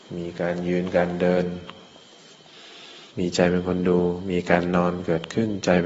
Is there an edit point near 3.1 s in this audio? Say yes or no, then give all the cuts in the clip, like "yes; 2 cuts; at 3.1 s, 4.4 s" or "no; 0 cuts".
yes; 1 cut; at 3.1 s